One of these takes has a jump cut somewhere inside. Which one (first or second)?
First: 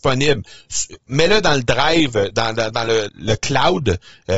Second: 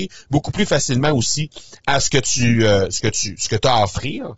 first